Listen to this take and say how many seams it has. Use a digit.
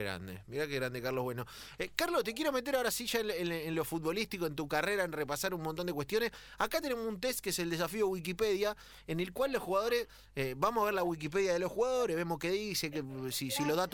0